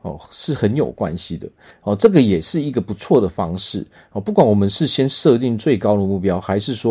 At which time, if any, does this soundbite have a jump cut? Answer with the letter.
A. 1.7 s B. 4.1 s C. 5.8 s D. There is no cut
A